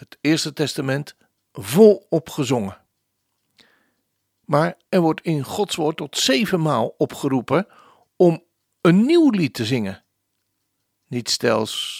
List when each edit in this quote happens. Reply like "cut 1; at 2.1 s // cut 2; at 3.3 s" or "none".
cut 1; at 4.9 s

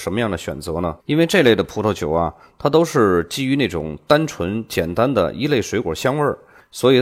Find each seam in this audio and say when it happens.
cut 1; at 1.0 s

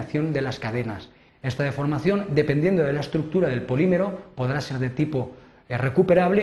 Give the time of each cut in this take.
cut 1; at 1.3 s

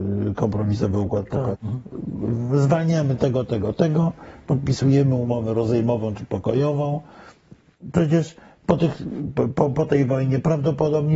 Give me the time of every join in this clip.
cut 1; at 1.5 s

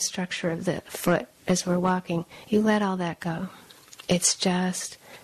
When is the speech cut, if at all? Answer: none

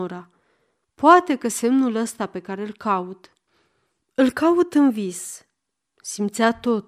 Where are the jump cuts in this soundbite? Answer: none

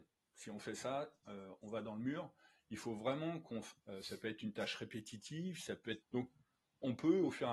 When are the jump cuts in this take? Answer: cut 1; at 3.8 s // cut 2; at 6.0 s

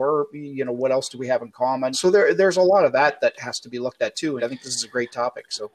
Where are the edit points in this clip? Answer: cut 1; at 1.9 s // cut 2; at 4.4 s

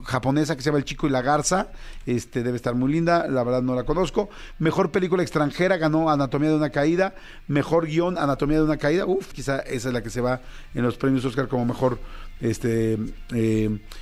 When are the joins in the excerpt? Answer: cut 1; at 9.3 s

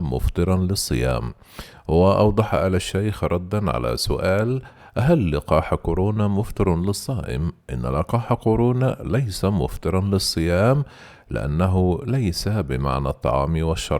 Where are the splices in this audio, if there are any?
none

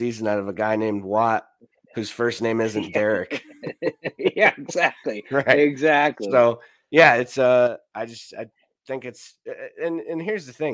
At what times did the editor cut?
none

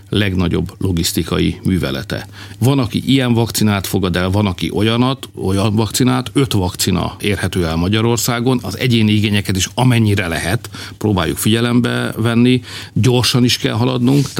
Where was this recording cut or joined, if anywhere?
cut 1; at 2.6 s // cut 2; at 7.2 s

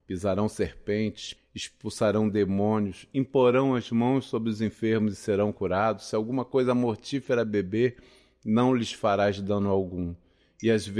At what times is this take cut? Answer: cut 1; at 1.4 s

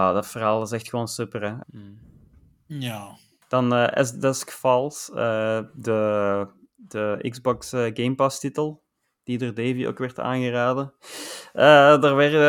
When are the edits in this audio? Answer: cut 1; at 1.6 s

